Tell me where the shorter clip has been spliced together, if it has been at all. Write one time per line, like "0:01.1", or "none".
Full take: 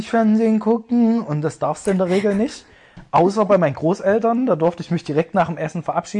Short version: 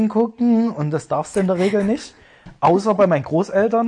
none

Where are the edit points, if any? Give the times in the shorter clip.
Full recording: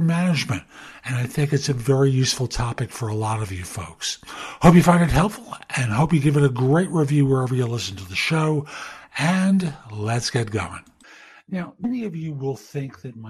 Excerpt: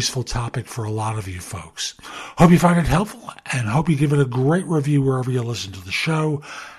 none

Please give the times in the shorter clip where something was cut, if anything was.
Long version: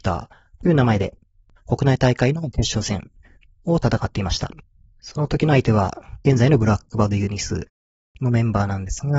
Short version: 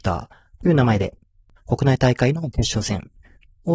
none

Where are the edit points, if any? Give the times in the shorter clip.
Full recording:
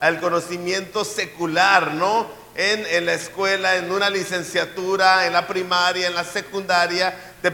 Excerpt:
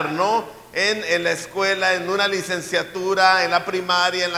none

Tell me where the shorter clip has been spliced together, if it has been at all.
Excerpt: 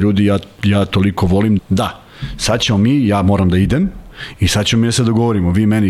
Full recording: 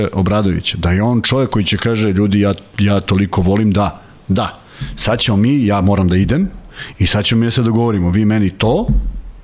0:01.6

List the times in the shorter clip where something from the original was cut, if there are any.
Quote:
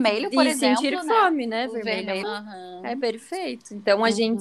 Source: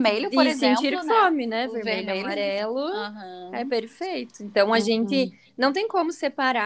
0:02.2

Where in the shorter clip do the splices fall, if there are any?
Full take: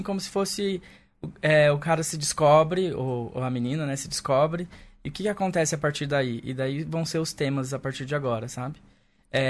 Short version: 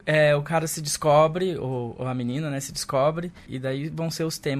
0:03.5

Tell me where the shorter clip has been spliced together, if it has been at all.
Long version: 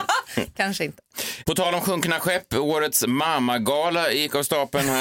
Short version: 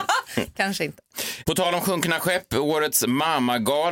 none

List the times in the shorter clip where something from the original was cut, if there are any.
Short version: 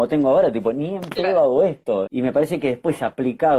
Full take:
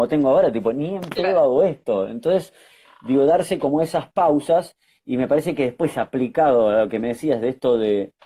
0:02.1

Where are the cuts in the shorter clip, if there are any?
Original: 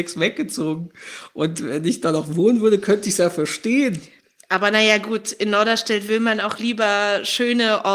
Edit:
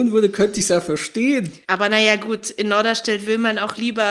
0:01.6

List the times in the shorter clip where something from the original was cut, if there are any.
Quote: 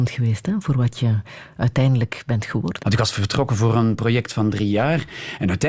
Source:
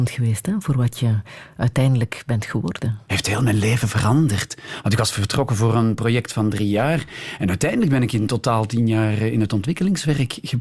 0:02.8

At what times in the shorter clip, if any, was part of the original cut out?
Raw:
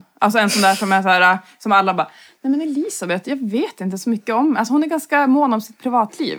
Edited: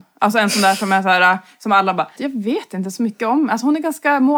0:02.2

